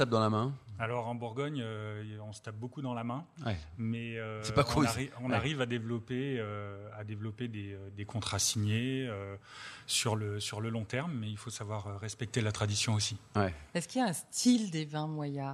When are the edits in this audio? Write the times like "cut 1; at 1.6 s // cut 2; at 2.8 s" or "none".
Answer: none